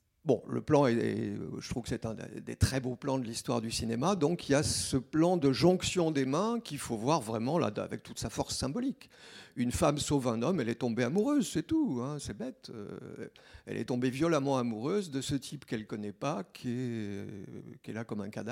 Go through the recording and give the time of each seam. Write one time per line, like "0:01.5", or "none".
none